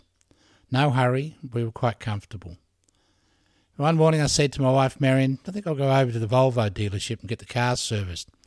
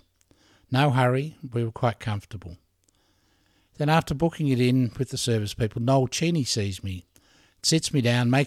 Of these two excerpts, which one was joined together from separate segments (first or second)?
second